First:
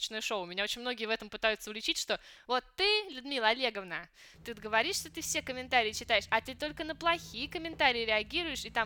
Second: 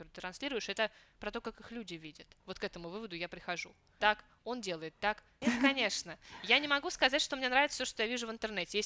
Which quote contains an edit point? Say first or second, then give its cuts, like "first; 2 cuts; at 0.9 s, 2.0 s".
second; 3 cuts; at 2.4 s, 4.0 s, 5.4 s